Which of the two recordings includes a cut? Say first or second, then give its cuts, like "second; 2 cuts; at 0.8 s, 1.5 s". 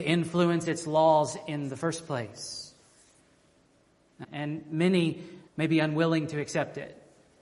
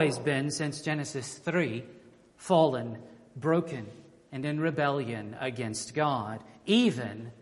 first; 2 cuts; at 4.2 s, 5.5 s